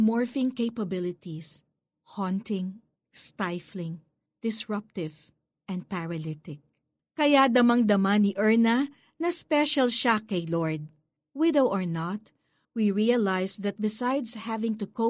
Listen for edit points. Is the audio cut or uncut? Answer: cut